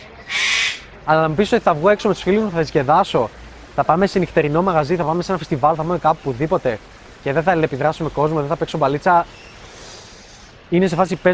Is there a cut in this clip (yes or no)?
no